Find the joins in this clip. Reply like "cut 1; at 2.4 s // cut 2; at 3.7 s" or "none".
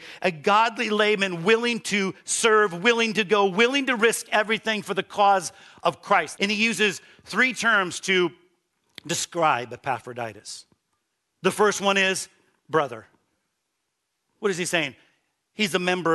cut 1; at 6.4 s